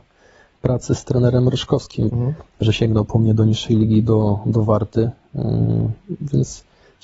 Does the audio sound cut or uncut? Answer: cut